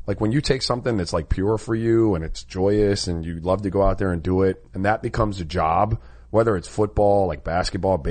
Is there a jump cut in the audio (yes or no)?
no